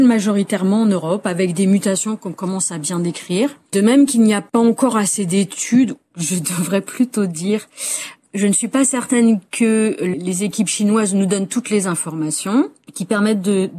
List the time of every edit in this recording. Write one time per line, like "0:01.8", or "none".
0:03.7